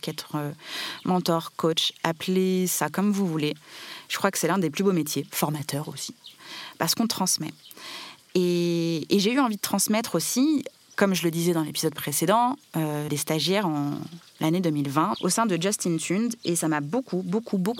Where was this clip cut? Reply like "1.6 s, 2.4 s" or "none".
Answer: 13.1 s, 15.1 s